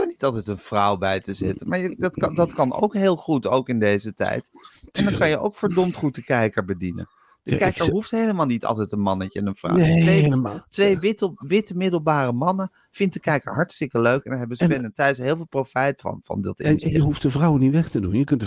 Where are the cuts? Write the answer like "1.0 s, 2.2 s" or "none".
none